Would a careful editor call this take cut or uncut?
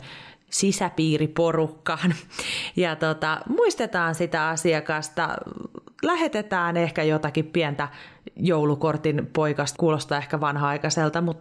cut